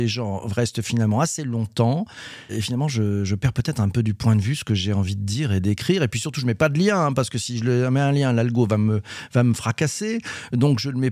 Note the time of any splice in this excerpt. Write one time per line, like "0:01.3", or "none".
0:02.5